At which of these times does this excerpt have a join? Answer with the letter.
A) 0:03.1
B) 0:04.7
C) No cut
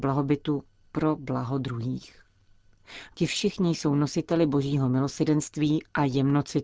A